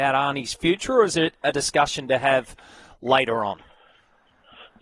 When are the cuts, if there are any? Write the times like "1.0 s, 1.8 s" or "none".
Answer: none